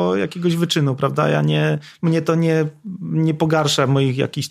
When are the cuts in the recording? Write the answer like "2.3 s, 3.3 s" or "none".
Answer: none